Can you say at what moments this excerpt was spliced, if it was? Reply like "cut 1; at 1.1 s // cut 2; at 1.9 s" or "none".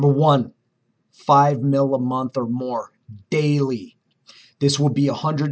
cut 1; at 1.1 s

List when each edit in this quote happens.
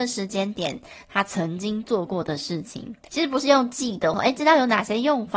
cut 1; at 3.1 s // cut 2; at 4.1 s

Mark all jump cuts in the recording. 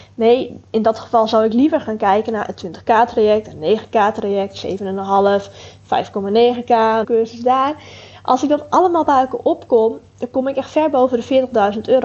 cut 1; at 7.0 s

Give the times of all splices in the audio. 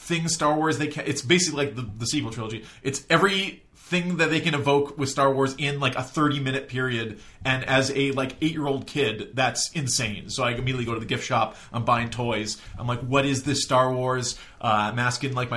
none

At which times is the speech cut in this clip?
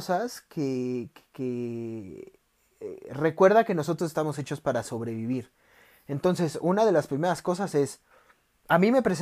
none

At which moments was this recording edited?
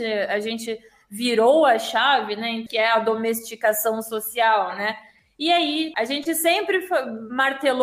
cut 1; at 2.7 s // cut 2; at 5.9 s

